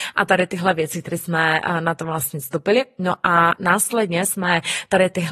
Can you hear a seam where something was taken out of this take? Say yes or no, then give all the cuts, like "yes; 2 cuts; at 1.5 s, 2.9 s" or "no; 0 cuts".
no; 0 cuts